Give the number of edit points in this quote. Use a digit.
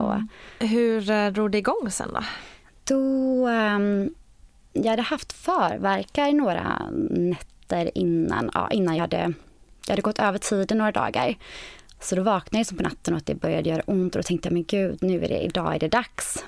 0